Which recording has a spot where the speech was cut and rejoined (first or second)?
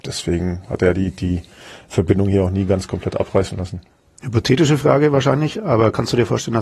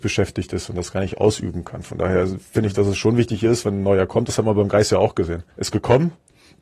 second